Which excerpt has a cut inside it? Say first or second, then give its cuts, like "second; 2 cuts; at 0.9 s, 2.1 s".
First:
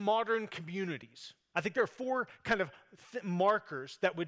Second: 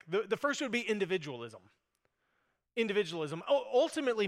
first; 1 cut; at 1.5 s